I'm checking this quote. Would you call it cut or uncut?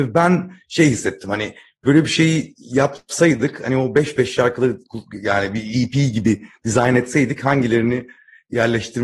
uncut